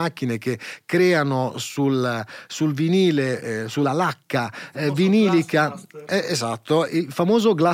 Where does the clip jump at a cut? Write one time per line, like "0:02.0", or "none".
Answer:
none